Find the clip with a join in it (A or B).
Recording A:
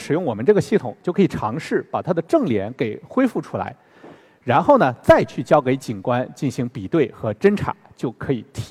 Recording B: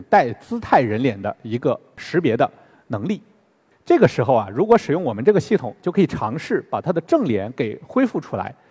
B